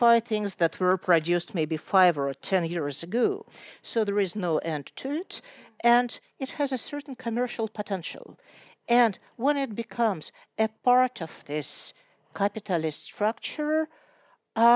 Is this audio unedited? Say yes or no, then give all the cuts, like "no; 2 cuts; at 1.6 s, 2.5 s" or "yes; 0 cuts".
yes; 0 cuts